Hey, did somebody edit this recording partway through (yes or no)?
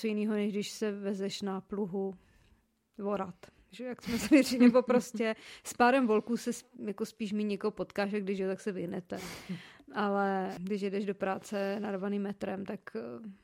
no